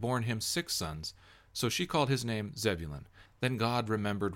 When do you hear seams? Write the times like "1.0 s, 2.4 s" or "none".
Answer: 3.3 s